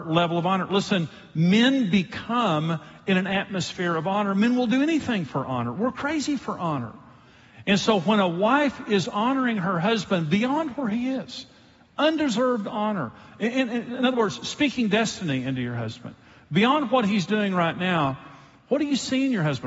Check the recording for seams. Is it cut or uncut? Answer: uncut